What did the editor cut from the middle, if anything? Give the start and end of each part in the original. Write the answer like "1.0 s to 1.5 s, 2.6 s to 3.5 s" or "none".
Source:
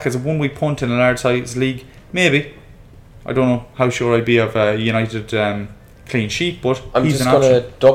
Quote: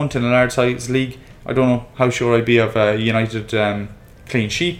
2.1 s to 3.2 s

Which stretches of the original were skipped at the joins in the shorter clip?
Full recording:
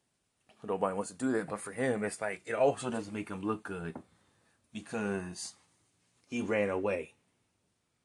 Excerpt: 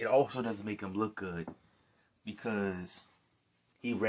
none

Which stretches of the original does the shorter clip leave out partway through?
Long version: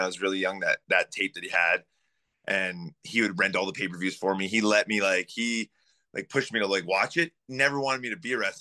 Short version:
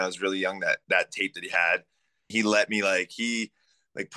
2.3 s to 4.5 s

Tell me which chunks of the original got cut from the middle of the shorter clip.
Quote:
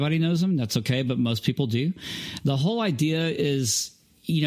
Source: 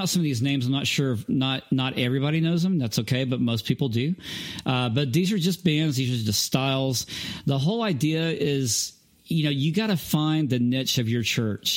4.6 s to 7.4 s

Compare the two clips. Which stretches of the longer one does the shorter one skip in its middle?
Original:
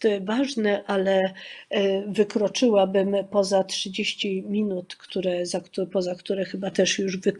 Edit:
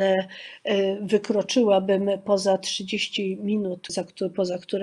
5.0 s to 5.5 s

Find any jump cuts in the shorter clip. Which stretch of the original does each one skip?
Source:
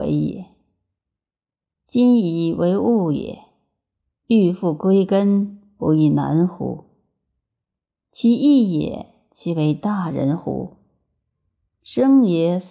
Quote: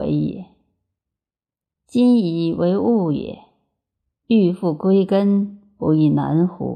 none

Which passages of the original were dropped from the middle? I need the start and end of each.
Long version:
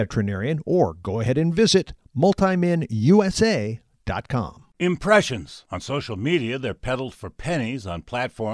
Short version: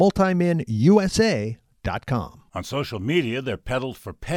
4.7 s to 5.7 s

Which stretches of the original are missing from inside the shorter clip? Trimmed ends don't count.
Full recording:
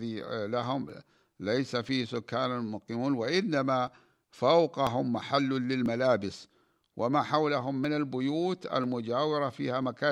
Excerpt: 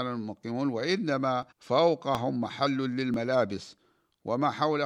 4.0 s to 4.2 s

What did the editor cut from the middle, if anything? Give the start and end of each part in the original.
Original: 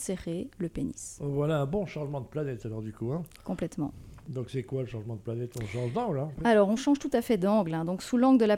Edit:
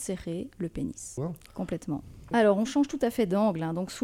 1.2 s to 3.1 s, 4.2 s to 6.4 s

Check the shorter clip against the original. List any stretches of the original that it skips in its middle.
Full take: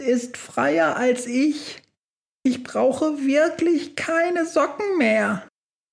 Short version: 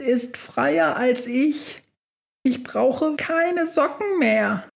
3.2 s to 4.0 s

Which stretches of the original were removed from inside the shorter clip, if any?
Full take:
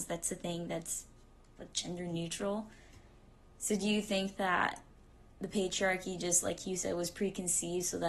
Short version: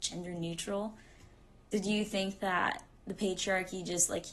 3.4 s to 3.7 s, 4.9 s to 5.3 s

